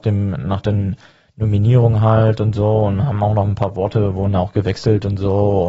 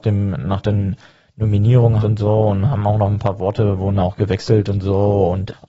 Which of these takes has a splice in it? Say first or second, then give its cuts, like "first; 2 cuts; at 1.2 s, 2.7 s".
second; 1 cut; at 2.0 s